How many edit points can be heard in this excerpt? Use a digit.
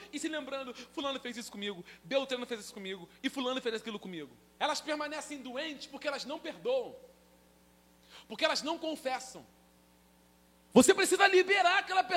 2